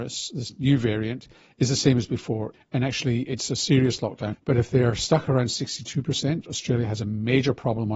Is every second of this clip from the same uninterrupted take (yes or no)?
no